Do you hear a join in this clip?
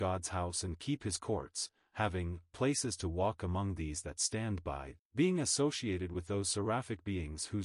yes; 1 cut; at 5.0 s

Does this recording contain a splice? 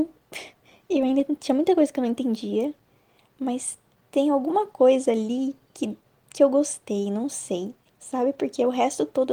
yes; 1 cut; at 7.9 s

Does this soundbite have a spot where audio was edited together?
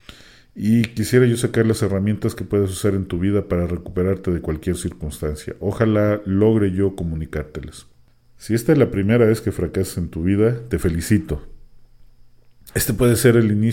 no; 0 cuts

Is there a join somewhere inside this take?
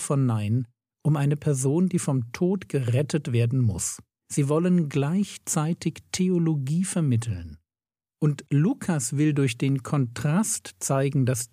yes; 1 cut; at 4.2 s

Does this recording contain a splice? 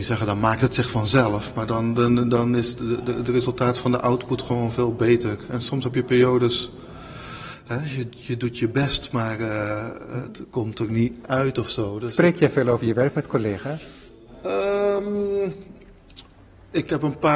no; 0 cuts

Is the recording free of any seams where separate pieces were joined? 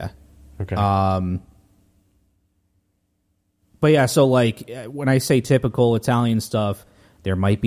yes; 0 cuts

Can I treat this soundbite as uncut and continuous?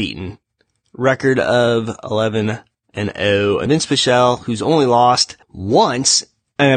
no; 2 cuts; at 3.7 s, 5.4 s

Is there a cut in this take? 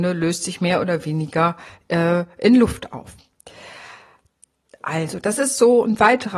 no; 0 cuts

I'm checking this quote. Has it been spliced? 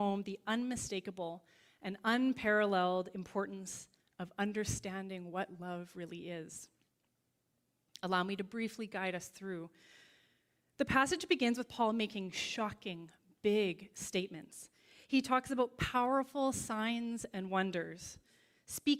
no; 0 cuts

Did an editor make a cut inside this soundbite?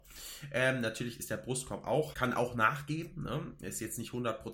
yes; 1 cut; at 2.1 s

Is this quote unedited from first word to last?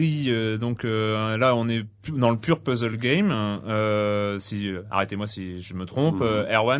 yes; 0 cuts

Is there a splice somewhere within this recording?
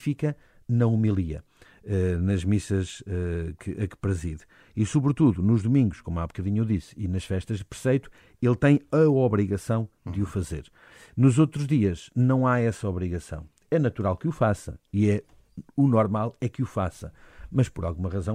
no; 0 cuts

